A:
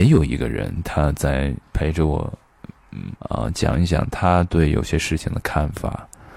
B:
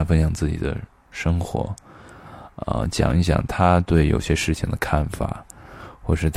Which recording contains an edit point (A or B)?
A